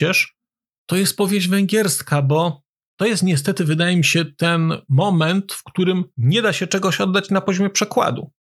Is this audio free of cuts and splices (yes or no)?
yes